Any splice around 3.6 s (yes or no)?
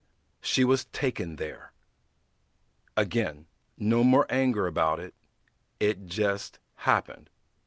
yes